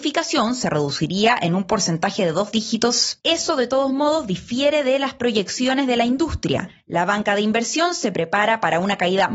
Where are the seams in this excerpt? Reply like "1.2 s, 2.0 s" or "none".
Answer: 3.2 s